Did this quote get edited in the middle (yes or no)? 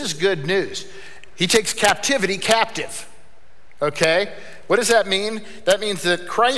no